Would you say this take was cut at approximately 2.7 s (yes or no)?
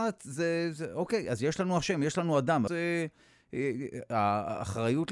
yes